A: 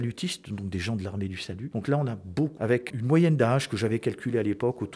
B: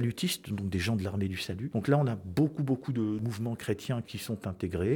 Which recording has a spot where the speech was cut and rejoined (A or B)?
A